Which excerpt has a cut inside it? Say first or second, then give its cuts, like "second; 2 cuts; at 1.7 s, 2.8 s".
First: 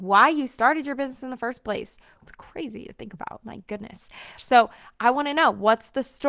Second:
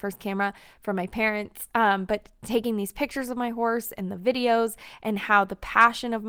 first; 2 cuts; at 2.2 s, 4.4 s